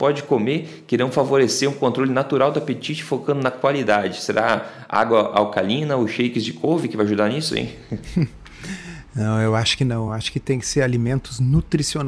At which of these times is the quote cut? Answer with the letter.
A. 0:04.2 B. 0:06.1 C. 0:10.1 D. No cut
D